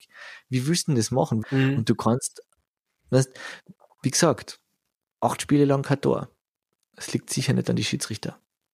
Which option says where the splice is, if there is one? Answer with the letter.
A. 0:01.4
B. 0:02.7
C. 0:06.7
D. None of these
A